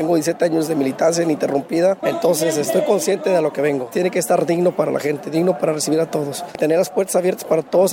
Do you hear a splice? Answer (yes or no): yes